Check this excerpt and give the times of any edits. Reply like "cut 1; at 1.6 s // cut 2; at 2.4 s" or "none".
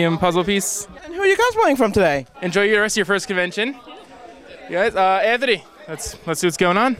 cut 1; at 1.0 s // cut 2; at 2.3 s